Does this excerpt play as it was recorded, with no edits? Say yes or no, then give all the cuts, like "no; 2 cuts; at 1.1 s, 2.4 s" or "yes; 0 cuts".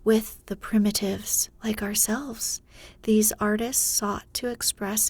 no; 1 cut; at 1.6 s